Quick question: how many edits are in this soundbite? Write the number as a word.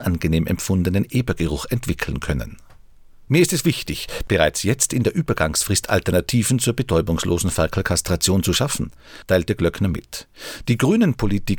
two